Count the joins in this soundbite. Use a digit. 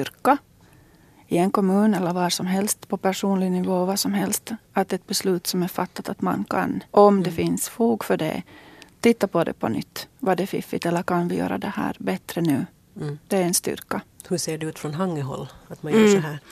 1